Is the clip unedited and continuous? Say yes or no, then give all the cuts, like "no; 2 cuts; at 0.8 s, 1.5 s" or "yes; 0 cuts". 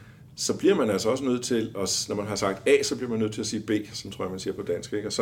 yes; 0 cuts